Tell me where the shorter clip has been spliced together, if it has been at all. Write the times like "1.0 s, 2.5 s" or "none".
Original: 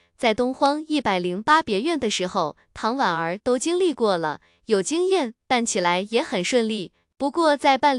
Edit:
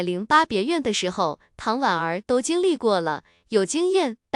none